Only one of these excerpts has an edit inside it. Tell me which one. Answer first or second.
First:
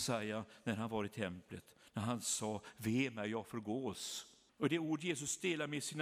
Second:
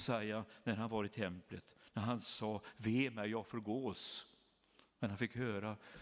first